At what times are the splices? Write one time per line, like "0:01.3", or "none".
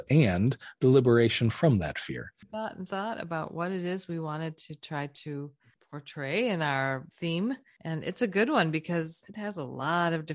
0:02.4